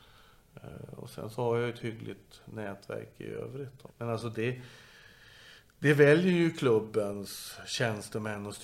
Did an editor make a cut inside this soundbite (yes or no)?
yes